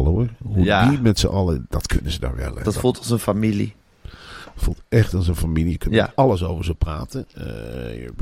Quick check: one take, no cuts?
yes; 0 cuts

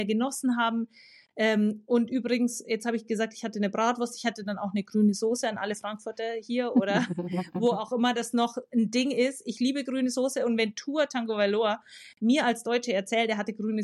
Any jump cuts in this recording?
no; 0 cuts

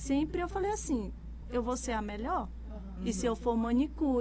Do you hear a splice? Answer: yes; 1 cut; at 1.4 s

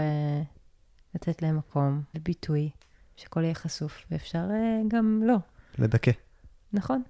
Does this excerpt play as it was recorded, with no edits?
no; 1 cut; at 2.1 s

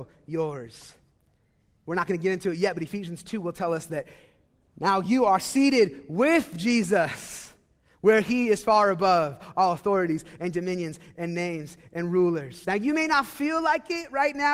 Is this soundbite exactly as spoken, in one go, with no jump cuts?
yes; 0 cuts

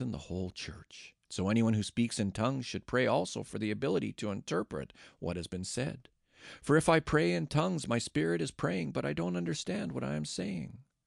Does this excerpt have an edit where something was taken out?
yes; 1 cut; at 1.2 s

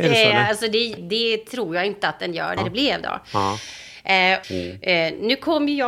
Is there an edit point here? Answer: yes; 3 cuts; at 1.0 s, 2.6 s, 4.4 s

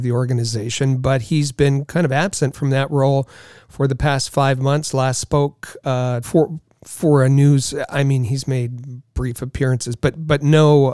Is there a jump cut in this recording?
yes; 1 cut; at 6.2 s

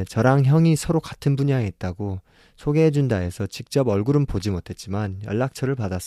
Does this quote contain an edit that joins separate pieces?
no; 0 cuts

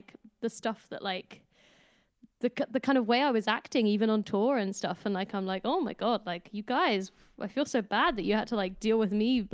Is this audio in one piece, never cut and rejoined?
yes; 0 cuts

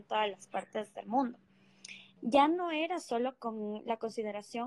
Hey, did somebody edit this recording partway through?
yes; 1 cut; at 2.2 s

